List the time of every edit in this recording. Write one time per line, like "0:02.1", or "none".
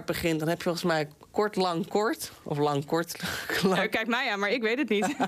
0:01.3